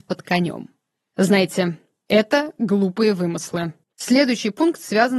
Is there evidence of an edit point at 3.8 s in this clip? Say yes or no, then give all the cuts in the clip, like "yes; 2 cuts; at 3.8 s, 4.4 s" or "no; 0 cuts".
yes; 1 cut; at 3.8 s